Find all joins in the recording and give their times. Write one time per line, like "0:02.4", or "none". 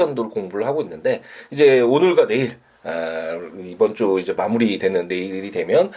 none